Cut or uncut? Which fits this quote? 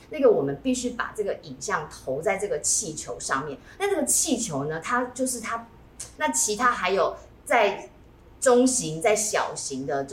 cut